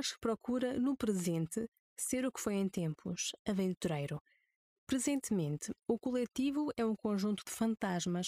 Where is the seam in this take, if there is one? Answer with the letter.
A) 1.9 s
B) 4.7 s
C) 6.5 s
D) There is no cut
B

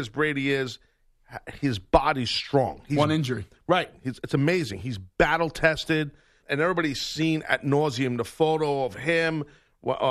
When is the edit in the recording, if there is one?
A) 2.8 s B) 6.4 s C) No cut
B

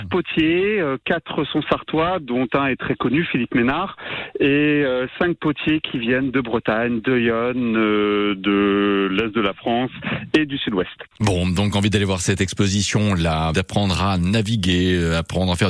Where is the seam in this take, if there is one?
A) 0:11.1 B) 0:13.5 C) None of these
B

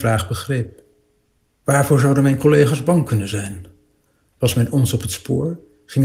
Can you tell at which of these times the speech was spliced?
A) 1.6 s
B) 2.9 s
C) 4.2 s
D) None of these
A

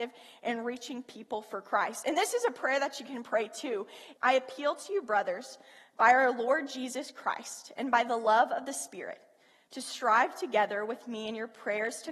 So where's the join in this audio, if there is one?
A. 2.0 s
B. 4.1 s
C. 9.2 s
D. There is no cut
B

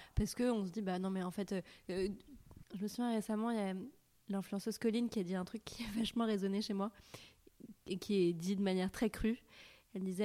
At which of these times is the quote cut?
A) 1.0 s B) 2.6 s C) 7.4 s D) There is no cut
B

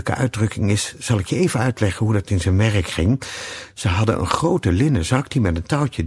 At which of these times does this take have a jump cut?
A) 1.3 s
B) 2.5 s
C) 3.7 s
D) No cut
D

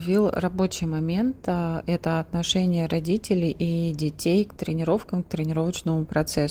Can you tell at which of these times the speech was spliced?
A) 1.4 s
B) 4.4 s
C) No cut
C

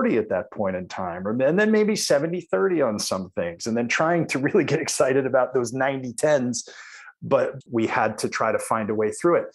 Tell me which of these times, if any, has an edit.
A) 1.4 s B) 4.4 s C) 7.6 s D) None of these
C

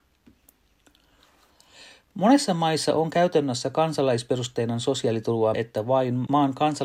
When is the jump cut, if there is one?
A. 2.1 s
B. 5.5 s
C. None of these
B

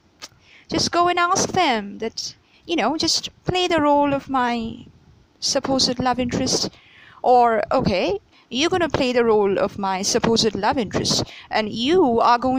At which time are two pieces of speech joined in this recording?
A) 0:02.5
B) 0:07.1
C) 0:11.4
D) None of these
A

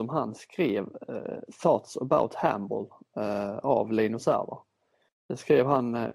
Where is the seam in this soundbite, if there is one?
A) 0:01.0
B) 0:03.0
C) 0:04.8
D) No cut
D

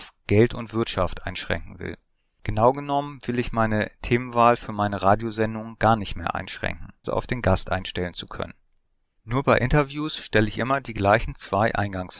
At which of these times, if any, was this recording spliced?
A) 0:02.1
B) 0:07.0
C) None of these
B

